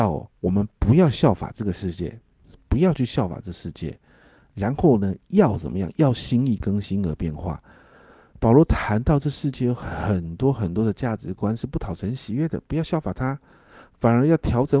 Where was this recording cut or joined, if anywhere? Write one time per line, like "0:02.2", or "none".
none